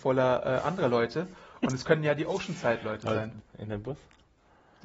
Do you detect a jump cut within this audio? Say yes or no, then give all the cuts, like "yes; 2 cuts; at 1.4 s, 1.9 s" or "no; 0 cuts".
yes; 1 cut; at 3.4 s